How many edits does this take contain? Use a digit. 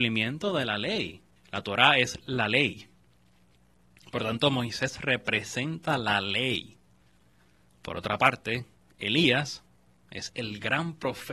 1